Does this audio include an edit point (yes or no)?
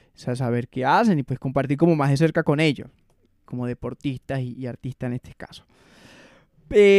yes